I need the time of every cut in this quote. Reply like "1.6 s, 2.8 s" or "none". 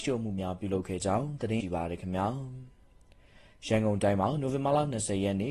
1.6 s